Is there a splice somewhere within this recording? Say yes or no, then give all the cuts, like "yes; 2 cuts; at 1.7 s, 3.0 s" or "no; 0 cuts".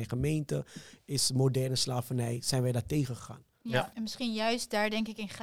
yes; 1 cut; at 3.9 s